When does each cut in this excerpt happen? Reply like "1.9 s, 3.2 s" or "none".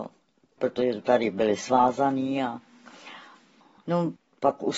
3.8 s